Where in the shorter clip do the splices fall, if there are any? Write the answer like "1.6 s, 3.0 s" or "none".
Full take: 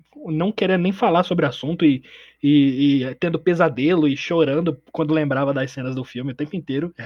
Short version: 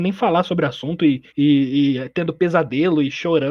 1.3 s